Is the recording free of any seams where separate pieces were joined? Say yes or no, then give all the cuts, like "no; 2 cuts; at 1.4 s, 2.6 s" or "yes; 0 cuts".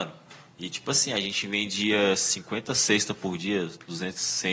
yes; 0 cuts